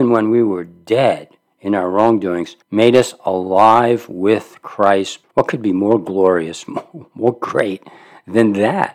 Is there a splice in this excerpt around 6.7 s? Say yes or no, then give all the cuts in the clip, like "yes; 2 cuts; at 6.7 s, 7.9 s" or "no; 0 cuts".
no; 2 cuts; at 2.6 s, 5.2 s